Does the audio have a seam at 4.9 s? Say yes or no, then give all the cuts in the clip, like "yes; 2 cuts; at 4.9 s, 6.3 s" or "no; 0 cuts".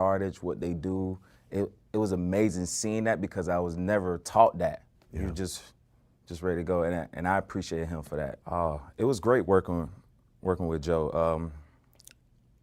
yes; 2 cuts; at 4.9 s, 8.4 s